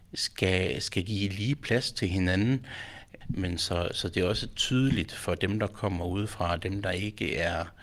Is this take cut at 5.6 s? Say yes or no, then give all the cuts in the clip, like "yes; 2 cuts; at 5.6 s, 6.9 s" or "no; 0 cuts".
no; 1 cut; at 3.2 s